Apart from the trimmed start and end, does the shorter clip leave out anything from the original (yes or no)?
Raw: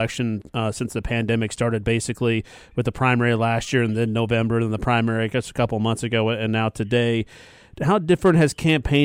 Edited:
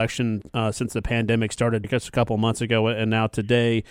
yes